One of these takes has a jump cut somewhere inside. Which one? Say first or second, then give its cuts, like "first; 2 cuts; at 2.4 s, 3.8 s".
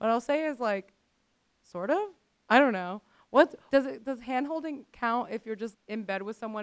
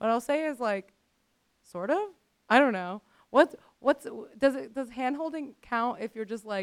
first; 2 cuts; at 3.7 s, 5.7 s